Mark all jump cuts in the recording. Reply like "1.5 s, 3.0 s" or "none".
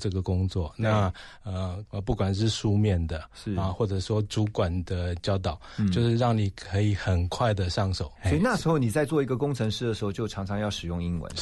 1.9 s, 8.2 s